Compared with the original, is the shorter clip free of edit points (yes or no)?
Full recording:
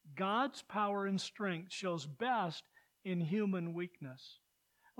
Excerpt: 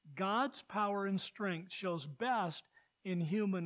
yes